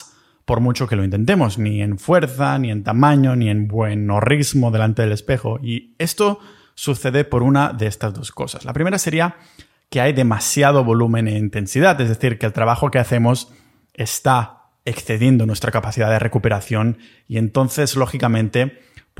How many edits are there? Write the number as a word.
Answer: zero